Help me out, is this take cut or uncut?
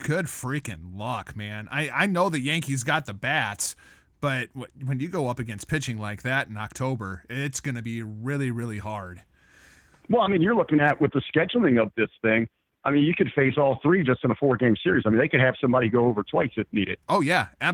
uncut